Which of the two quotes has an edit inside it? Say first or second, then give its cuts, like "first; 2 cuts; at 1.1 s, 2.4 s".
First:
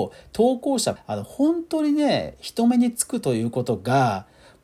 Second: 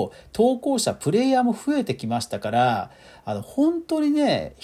first; 1 cut; at 1.0 s